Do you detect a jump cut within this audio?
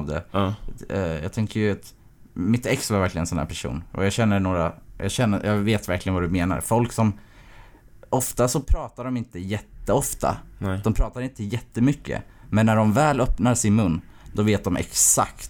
no; 0 cuts

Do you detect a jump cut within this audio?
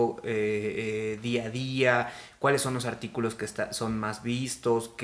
no; 0 cuts

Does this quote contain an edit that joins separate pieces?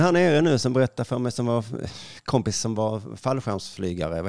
no; 0 cuts

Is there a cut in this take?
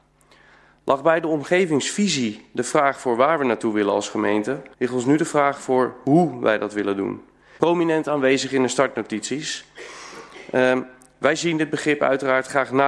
yes; 2 cuts; at 4.7 s, 7.6 s

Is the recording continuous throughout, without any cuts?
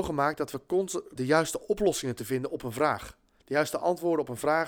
no; 1 cut; at 1.2 s

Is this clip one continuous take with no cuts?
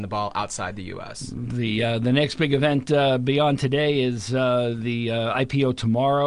yes; 0 cuts

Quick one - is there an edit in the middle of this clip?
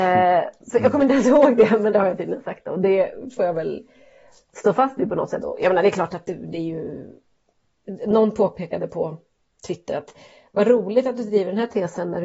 yes; 1 cut; at 5.4 s

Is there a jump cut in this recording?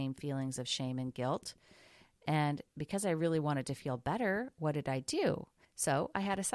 yes; 1 cut; at 5.6 s

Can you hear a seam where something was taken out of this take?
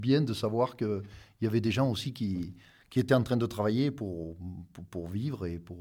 no; 0 cuts

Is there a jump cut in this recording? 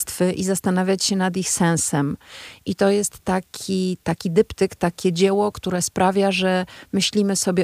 no; 0 cuts

